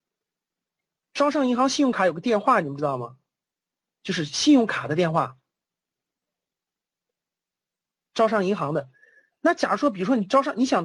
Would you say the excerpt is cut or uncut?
uncut